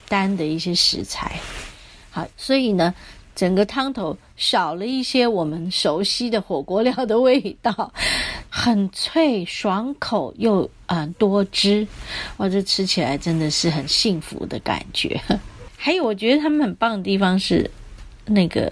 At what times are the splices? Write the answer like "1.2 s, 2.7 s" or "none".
2.3 s, 8.5 s, 15.7 s